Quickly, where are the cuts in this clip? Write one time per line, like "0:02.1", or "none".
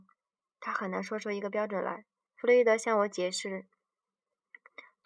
0:02.3